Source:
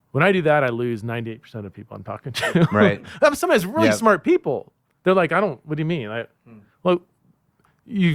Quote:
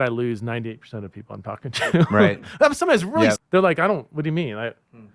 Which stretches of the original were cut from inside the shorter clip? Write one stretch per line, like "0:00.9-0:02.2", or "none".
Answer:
0:04.0-0:04.9